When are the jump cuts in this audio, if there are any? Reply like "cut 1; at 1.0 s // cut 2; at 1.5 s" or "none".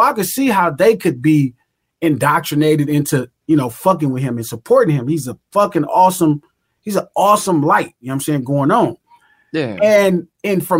none

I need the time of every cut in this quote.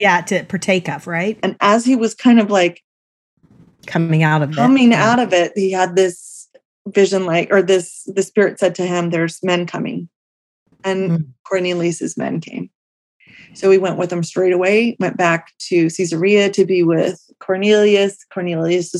cut 1; at 1.4 s

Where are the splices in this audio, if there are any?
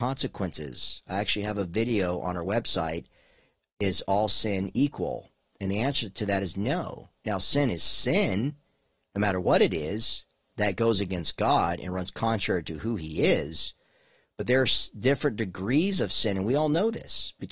none

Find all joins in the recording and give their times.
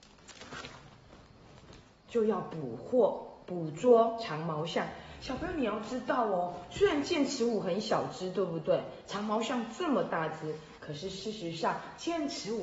none

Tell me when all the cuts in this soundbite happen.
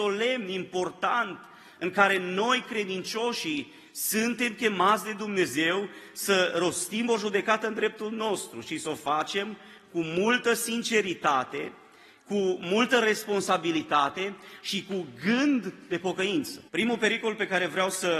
cut 1; at 16.7 s

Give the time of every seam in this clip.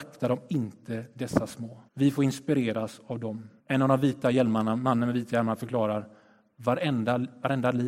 cut 1; at 1.9 s // cut 2; at 3.6 s

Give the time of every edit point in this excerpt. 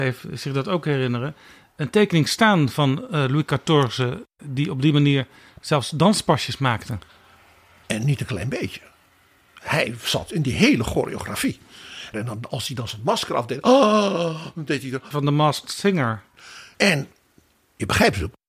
cut 1; at 12.1 s // cut 2; at 15.1 s // cut 3; at 16.7 s

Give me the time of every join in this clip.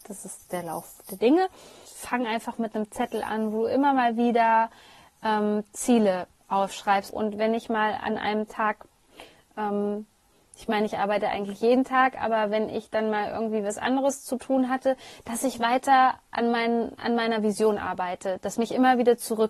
cut 1; at 1.8 s // cut 2; at 7.1 s

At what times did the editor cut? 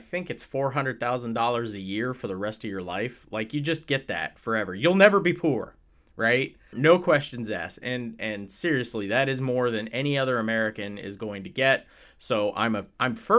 cut 1; at 6.7 s

